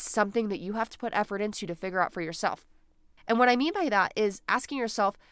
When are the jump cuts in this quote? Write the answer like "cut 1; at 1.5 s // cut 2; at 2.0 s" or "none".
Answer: cut 1; at 3.2 s